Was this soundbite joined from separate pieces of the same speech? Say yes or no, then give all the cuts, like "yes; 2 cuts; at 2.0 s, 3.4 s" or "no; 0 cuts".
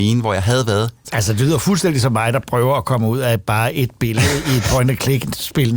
yes; 1 cut; at 1.0 s